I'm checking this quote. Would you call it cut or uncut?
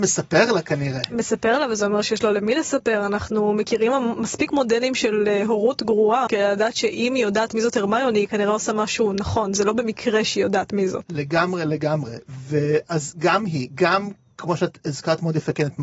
cut